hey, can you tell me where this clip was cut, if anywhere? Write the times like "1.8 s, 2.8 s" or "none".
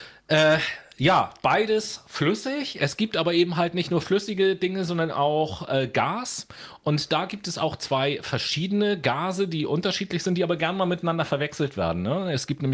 none